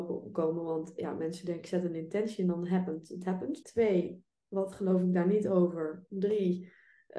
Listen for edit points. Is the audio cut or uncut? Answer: cut